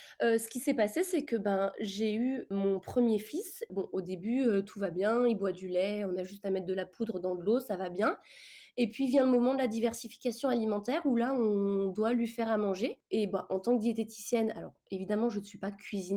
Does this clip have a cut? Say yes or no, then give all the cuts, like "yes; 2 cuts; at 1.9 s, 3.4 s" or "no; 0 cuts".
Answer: no; 0 cuts